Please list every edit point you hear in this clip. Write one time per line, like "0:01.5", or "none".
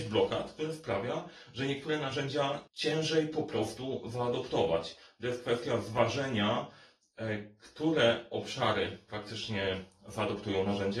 0:02.7